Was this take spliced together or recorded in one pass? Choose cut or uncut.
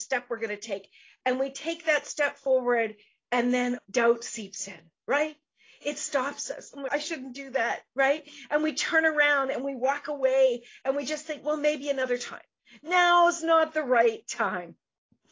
cut